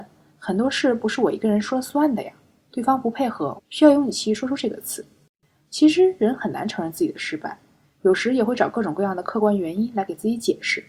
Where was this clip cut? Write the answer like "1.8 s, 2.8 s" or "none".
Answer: 3.6 s